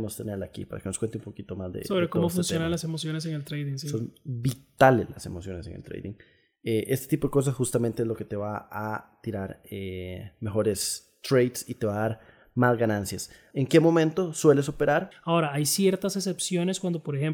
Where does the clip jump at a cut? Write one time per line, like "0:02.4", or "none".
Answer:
0:13.5
0:15.1